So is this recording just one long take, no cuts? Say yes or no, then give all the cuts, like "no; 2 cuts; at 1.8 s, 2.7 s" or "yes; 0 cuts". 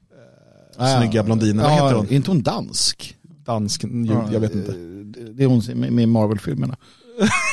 yes; 0 cuts